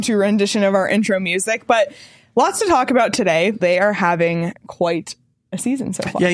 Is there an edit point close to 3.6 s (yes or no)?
yes